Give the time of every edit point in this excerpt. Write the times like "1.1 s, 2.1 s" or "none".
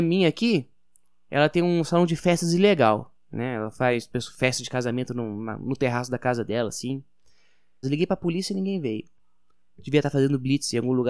7.8 s